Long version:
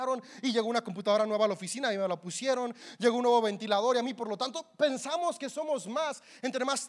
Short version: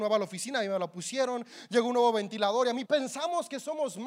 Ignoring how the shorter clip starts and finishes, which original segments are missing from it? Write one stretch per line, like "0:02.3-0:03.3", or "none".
0:04.1-0:04.7